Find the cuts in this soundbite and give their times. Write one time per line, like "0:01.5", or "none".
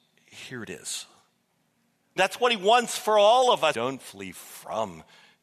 0:02.2
0:03.7